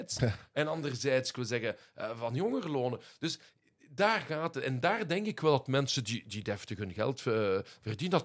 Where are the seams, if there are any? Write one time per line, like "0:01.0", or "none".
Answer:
none